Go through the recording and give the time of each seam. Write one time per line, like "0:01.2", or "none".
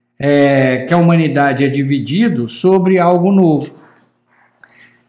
none

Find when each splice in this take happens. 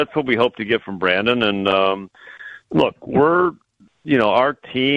none

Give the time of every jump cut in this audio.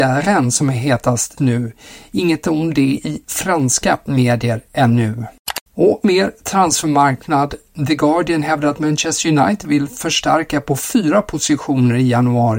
0:01.4
0:05.7

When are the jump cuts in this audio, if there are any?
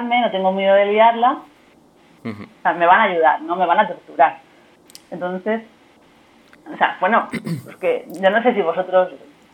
none

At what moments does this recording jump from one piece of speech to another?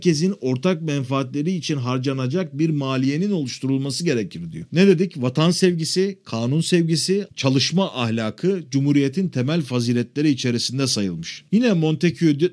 0:07.3

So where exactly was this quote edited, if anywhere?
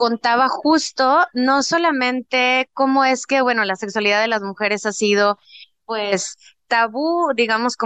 none

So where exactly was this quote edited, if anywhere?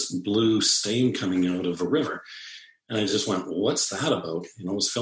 none

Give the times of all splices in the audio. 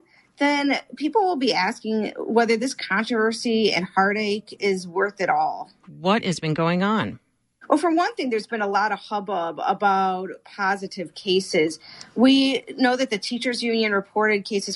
0:05.8

